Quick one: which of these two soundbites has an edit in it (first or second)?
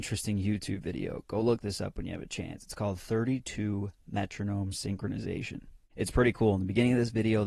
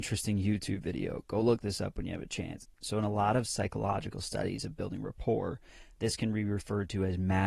second